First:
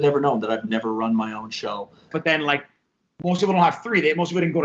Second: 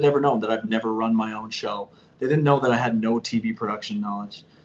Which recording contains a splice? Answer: first; 1 cut; at 2.1 s

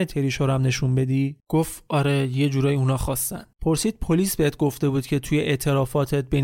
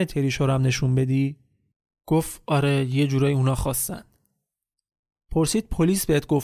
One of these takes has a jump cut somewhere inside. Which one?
first; 2 cuts; at 1.4 s, 3.5 s

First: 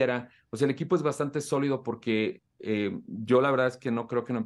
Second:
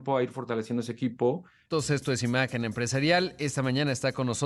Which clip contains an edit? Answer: second; 1 cut; at 1.7 s

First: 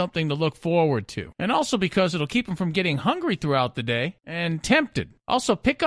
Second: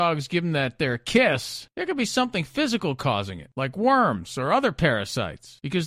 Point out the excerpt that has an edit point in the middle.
second; 1 cut; at 1.7 s

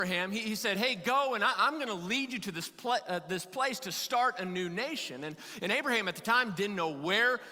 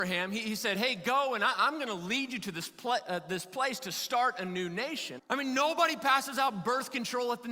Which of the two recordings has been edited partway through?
second; 1 cut; at 5.2 s

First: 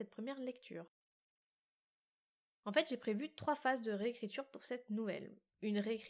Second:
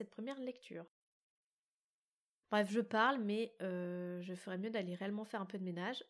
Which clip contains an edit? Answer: second; 1 cut; at 2.4 s

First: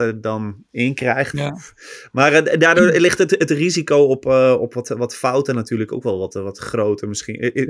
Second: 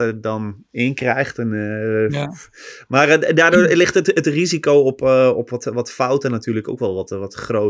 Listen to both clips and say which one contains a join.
first; 1 cut; at 1.3 s

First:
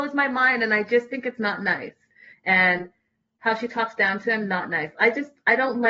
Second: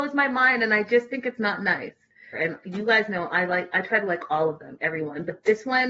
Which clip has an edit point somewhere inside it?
second; 1 cut; at 2.3 s

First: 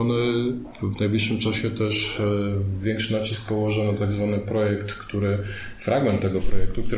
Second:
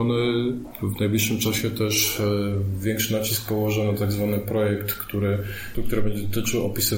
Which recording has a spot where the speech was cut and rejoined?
second; 1 cut; at 5.7 s

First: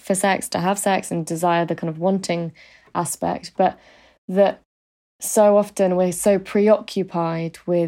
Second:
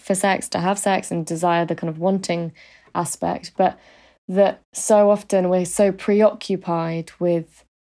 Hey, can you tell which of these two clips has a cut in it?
second; 1 cut; at 4.6 s

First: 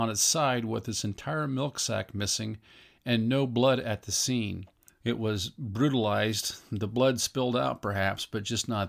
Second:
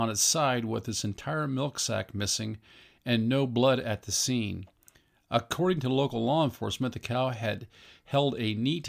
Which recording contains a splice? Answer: first; 1 cut; at 4.9 s

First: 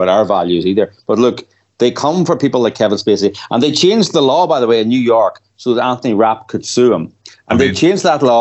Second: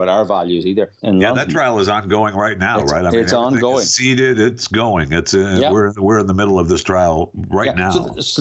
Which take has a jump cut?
second; 1 cut; at 1.0 s

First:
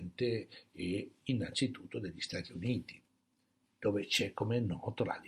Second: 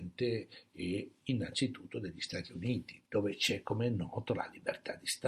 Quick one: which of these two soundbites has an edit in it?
second; 1 cut; at 3.1 s

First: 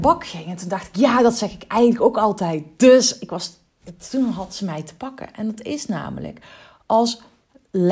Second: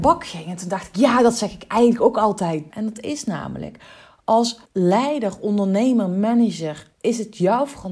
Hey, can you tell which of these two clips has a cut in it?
second; 3 cuts; at 2.7 s, 4.7 s, 6.9 s

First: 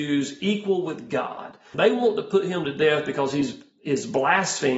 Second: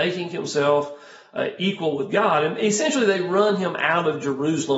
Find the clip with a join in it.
first; 1 cut; at 1.7 s

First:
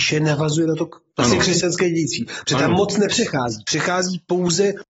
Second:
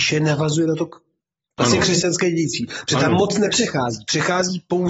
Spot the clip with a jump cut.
first; 1 cut; at 1.1 s

